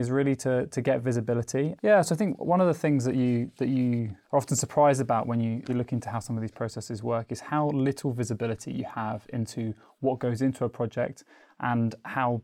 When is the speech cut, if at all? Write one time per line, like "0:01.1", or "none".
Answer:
0:01.8
0:04.2
0:05.7